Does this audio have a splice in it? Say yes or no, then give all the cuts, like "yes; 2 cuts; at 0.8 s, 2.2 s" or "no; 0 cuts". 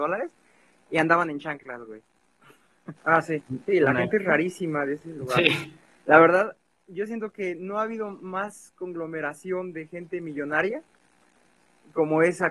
yes; 1 cut; at 3.0 s